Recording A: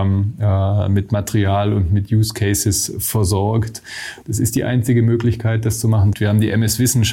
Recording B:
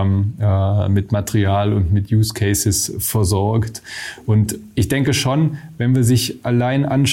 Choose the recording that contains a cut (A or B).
A